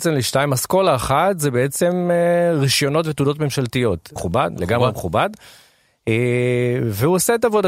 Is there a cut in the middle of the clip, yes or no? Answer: yes